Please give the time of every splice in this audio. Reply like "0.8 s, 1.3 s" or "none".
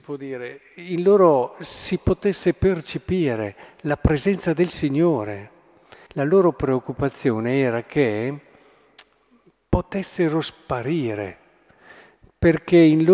6.1 s